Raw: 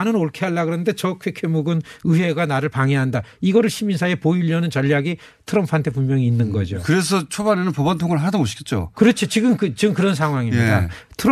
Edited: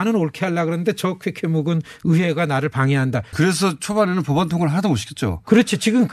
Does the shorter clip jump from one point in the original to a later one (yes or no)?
yes